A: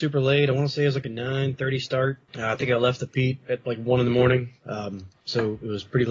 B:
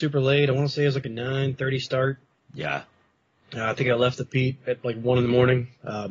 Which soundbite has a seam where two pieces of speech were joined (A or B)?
A